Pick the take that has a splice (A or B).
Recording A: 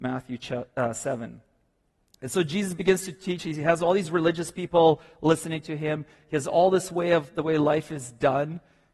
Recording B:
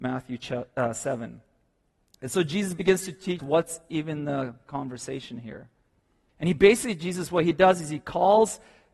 B